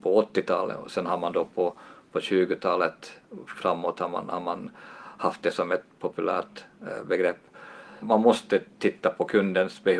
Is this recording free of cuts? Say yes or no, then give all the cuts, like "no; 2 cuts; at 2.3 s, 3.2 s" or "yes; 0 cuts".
no; 1 cut; at 8.0 s